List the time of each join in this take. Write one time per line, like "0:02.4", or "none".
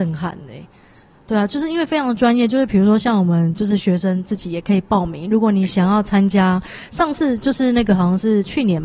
none

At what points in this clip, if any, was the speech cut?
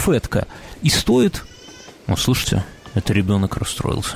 0:02.0

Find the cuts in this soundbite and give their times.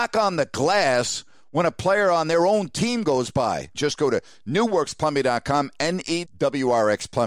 0:03.7
0:06.2

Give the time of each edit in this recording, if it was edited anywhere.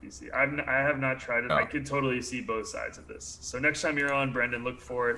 0:01.5

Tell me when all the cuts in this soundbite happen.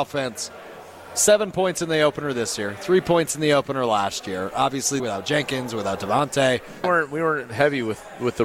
0:05.0
0:06.8

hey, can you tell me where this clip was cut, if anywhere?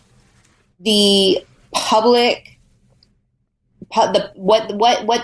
none

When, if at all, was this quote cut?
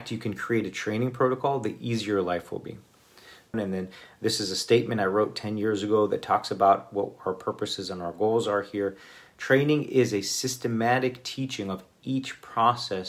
0:03.5

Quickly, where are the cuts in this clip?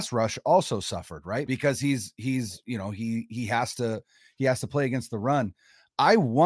0:01.5

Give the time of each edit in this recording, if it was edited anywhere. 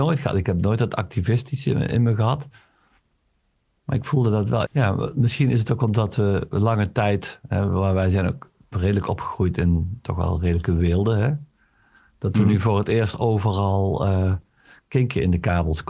0:04.6

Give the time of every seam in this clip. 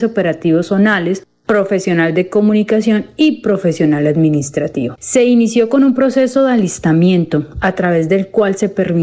0:05.0

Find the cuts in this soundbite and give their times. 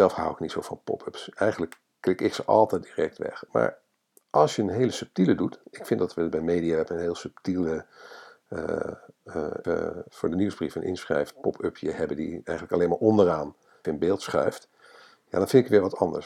0:09.6
0:13.8

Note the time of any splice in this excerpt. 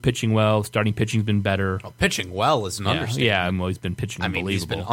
none

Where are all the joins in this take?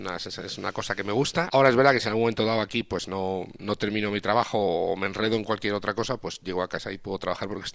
0:01.5

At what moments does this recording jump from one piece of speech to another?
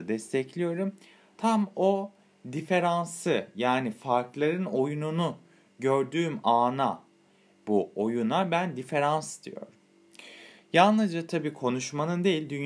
none

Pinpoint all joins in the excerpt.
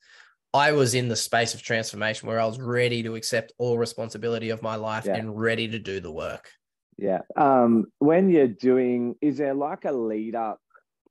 0:07.3
0:09.2

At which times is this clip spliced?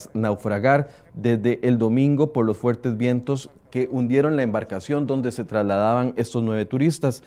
none

